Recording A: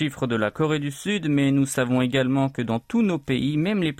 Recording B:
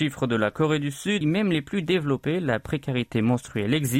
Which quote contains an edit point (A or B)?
B